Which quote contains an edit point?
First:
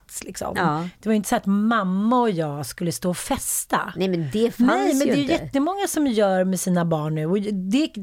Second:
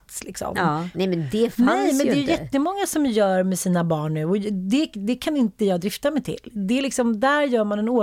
second; 1 cut; at 0.9 s

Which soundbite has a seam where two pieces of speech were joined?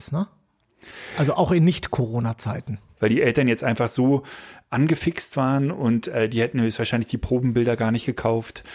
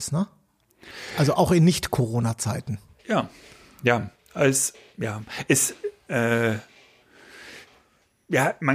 first; 1 cut; at 3.0 s

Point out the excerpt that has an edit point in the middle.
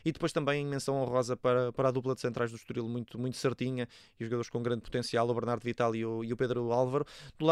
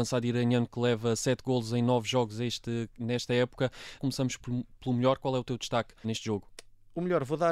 second; 2 cuts; at 4.0 s, 6.0 s

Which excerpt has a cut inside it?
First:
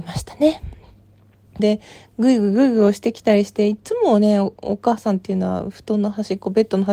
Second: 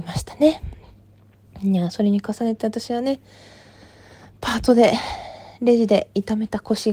first; 1 cut; at 1.6 s

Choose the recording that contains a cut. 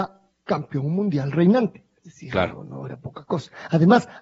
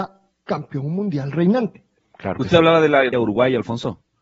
second; 2 cuts; at 2.0 s, 3.1 s

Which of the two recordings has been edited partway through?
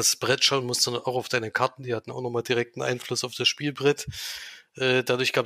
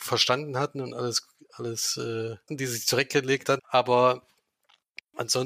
second; 2 cuts; at 2.5 s, 3.6 s

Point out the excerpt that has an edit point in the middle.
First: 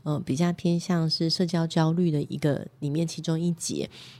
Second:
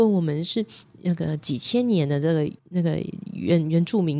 second; 1 cut; at 2.6 s

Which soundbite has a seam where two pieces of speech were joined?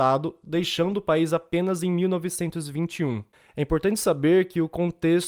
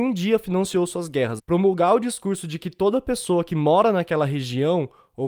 second; 1 cut; at 1.4 s

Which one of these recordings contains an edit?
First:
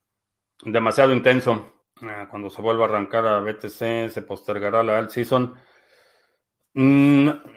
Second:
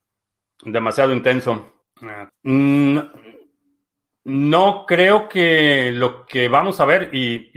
second; 1 cut; at 2.3 s

